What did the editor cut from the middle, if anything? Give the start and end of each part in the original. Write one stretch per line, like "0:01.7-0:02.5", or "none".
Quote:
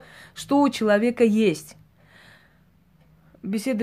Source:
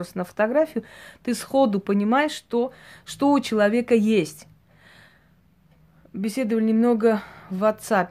none